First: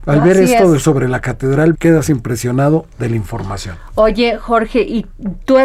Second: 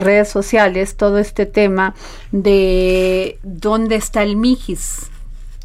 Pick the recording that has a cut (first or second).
first